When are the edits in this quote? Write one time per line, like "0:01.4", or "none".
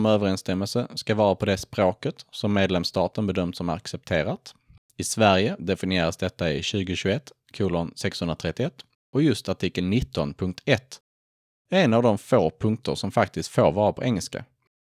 none